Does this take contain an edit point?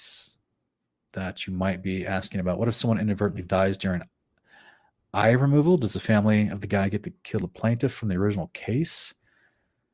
no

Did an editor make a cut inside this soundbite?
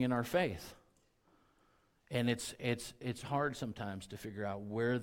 yes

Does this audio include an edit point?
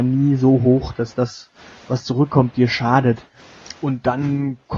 yes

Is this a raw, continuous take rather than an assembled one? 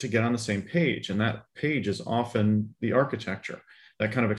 yes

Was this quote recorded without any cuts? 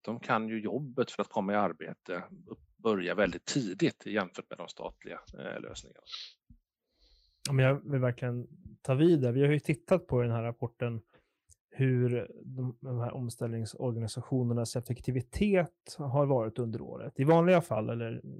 yes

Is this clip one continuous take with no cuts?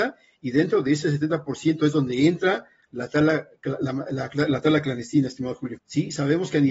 no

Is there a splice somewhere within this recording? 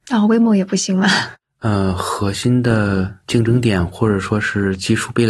yes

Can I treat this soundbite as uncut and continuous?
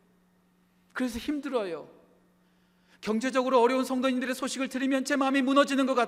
yes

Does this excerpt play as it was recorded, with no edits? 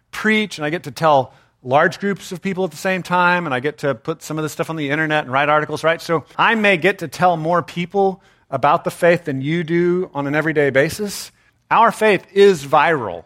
no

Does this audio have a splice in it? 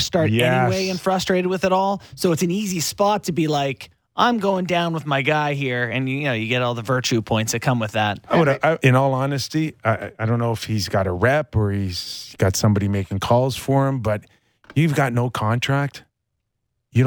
yes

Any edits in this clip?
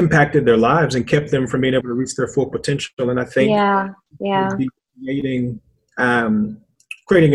no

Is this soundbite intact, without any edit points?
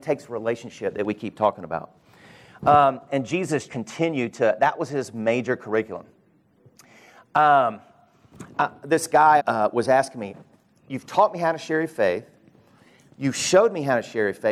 no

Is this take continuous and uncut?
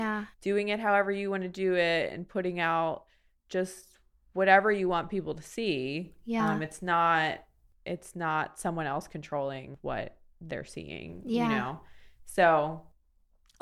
yes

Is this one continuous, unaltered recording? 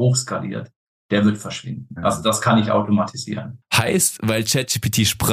no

